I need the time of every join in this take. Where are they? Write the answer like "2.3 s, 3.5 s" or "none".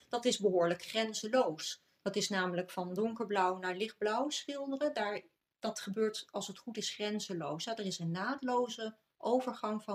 none

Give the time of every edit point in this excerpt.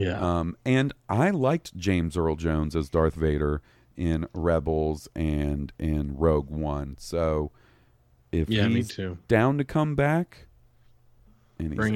none

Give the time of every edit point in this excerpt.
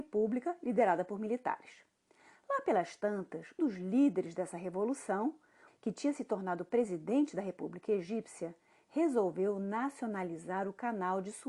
3.6 s, 5.7 s

